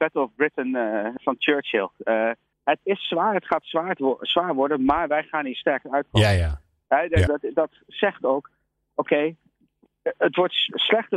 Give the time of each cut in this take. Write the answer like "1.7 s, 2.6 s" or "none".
1.2 s, 2.5 s, 7.3 s